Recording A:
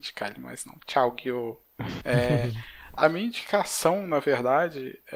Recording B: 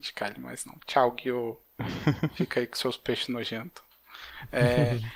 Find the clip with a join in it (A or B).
A